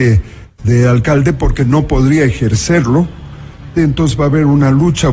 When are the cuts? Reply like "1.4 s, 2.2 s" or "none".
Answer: 3.8 s